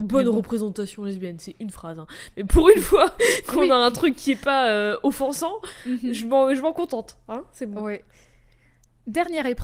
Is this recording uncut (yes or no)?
yes